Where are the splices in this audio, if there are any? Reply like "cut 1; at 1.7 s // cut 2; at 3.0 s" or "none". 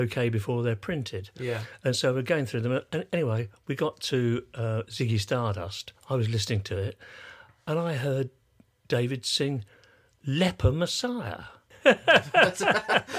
cut 1; at 11.7 s